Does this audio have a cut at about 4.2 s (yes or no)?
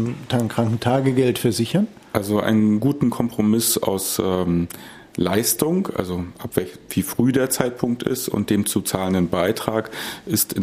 no